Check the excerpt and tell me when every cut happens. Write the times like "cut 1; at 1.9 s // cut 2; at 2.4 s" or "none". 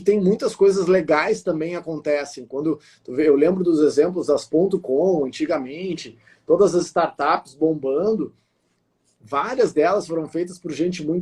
none

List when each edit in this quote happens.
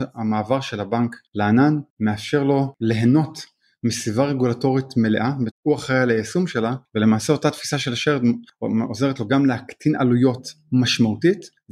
cut 1; at 5.5 s

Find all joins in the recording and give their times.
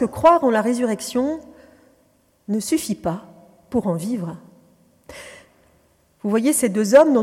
none

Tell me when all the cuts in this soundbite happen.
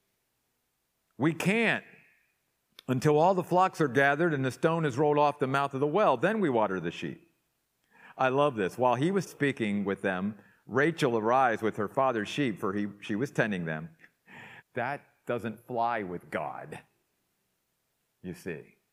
cut 1; at 9.3 s // cut 2; at 14.6 s

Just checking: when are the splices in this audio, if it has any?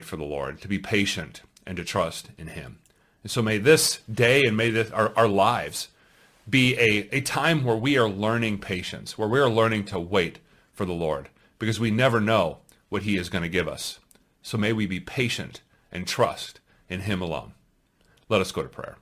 none

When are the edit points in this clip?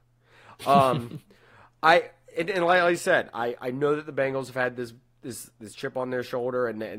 none

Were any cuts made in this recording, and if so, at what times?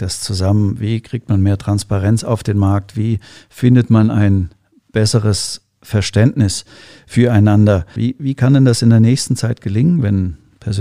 cut 1; at 8.0 s

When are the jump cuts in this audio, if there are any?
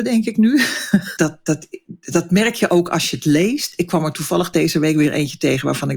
cut 1; at 1.2 s

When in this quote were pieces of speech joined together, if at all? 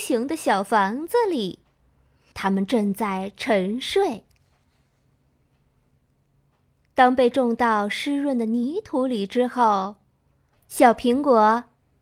cut 1; at 2.3 s // cut 2; at 10.5 s

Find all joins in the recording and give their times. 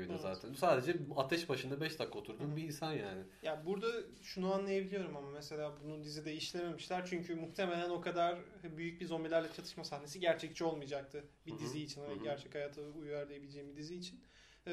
none

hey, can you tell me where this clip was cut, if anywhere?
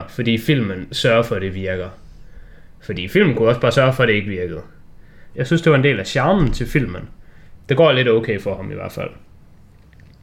cut 1; at 5.3 s // cut 2; at 7.6 s

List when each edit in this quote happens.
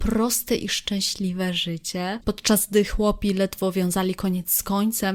cut 1; at 2.2 s

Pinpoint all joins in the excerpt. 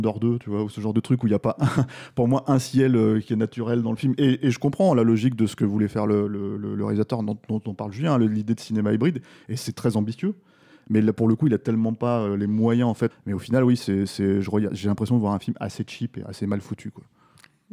cut 1; at 13.1 s // cut 2; at 16.2 s

